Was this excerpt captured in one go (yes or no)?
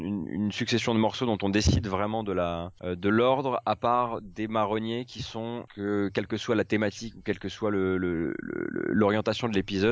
yes